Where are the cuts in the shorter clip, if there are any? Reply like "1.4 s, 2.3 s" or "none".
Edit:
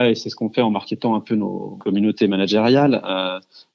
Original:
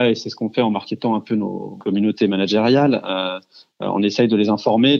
none